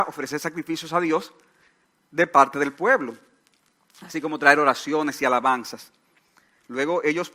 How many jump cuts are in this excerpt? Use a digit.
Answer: 0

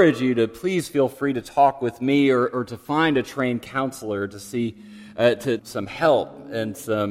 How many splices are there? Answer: 1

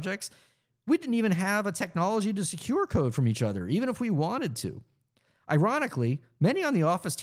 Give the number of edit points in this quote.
0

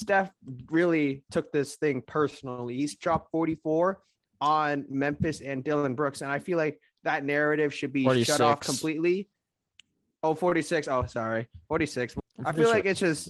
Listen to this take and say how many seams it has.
1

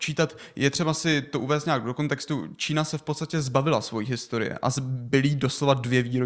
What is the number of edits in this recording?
0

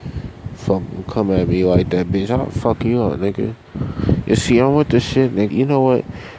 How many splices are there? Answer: 1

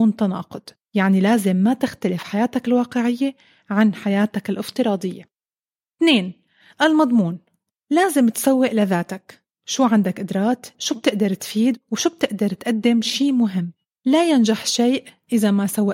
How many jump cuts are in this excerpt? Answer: 1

